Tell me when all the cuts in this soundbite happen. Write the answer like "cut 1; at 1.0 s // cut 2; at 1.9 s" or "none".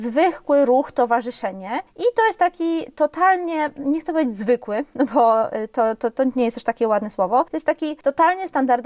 none